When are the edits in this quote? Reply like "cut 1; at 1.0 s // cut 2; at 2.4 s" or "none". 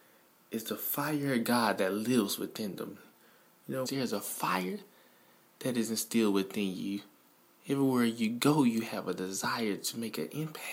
cut 1; at 3.9 s